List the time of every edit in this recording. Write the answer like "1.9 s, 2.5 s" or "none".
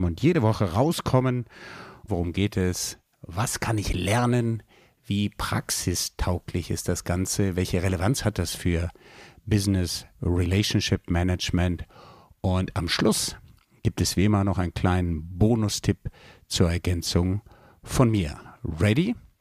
2.1 s